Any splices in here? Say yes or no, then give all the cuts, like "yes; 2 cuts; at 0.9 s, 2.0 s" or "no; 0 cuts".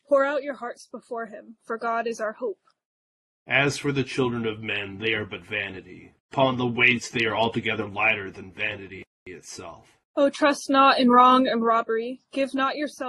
yes; 2 cuts; at 6.2 s, 10.0 s